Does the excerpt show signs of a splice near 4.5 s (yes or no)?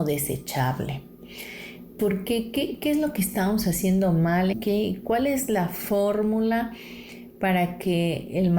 yes